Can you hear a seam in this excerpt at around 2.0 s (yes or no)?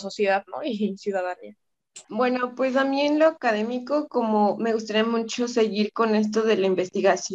yes